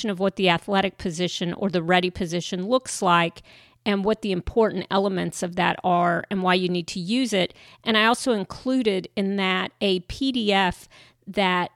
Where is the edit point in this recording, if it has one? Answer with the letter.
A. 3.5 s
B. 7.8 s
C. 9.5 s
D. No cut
B